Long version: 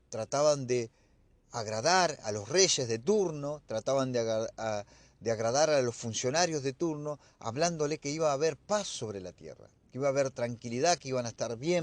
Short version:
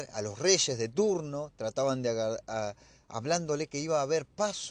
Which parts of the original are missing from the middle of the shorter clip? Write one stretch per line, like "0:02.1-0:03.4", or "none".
0:05.1-0:07.3